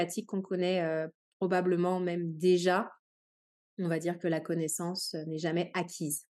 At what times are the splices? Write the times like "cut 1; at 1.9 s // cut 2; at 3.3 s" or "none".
none